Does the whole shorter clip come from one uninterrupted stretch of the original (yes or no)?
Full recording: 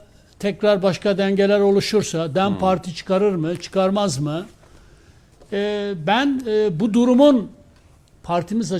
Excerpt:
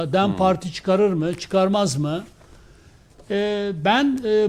yes